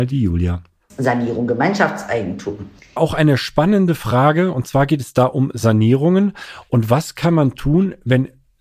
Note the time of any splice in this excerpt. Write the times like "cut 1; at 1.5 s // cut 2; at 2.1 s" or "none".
cut 1; at 3.0 s